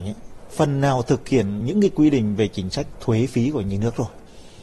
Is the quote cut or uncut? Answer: uncut